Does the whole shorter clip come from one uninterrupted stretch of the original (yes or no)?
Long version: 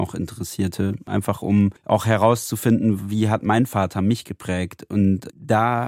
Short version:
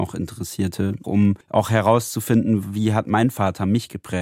no